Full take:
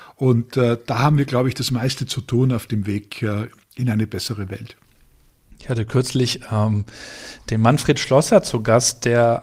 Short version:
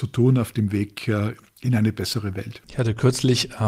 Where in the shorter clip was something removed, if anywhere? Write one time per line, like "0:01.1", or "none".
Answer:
0:02.6